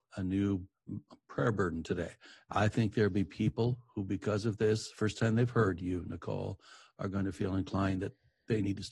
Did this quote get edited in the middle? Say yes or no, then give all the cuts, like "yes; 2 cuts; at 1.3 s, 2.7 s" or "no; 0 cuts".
no; 0 cuts